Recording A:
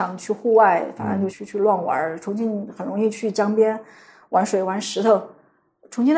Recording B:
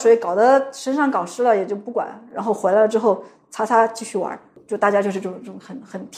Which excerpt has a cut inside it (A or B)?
A